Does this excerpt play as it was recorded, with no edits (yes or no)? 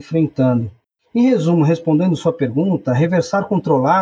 yes